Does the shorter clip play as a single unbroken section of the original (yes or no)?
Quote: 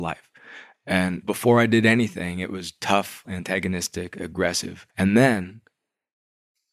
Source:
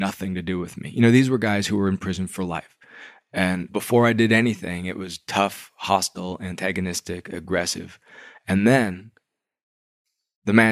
no